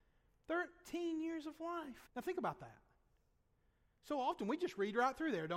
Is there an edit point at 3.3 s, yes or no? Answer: no